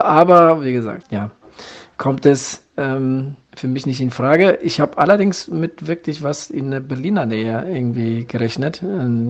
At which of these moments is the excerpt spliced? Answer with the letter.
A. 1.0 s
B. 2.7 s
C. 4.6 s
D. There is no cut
A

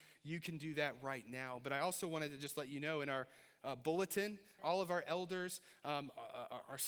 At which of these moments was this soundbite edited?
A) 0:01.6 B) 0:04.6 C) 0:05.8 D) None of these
B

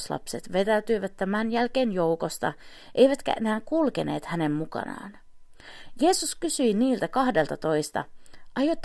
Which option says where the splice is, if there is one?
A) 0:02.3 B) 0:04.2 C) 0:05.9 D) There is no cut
D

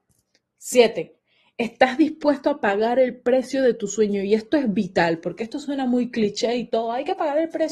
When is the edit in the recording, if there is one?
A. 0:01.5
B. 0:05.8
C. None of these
C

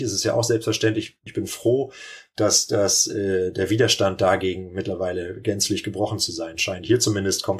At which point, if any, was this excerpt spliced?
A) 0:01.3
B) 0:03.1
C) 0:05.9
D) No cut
A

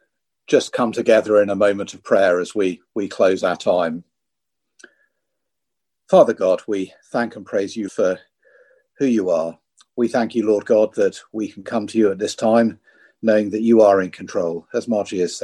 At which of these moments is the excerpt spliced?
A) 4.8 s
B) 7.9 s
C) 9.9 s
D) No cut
B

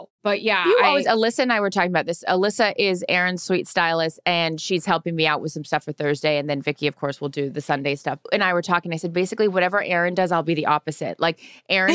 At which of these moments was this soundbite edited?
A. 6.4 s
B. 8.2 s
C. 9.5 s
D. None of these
B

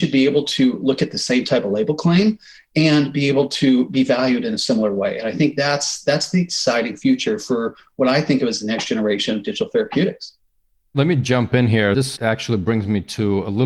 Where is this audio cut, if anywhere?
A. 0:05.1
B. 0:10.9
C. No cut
C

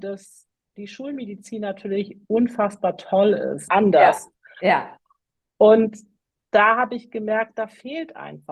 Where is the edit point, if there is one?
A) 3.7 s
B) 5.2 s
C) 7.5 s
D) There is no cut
A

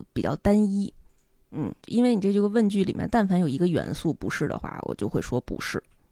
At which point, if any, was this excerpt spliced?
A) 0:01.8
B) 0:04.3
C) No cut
A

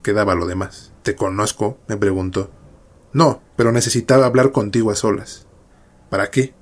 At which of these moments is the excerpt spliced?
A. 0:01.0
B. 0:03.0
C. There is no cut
A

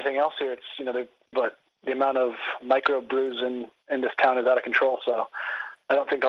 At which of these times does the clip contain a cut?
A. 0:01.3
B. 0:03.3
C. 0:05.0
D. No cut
A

